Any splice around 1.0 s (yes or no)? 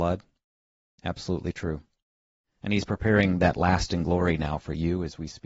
yes